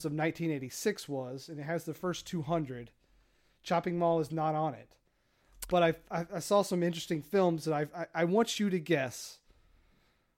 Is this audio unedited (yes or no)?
yes